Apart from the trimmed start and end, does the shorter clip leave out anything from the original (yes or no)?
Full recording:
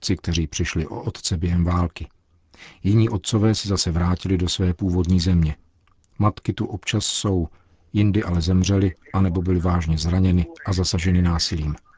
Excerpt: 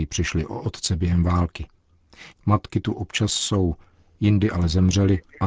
yes